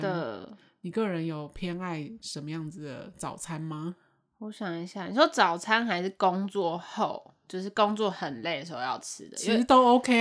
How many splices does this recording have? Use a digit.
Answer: 0